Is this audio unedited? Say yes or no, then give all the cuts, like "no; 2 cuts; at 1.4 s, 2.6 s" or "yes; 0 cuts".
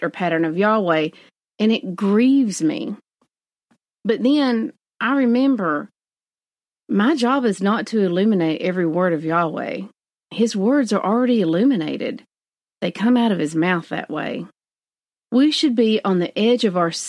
yes; 0 cuts